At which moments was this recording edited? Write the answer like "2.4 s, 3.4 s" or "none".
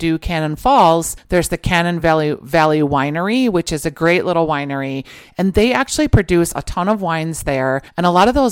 none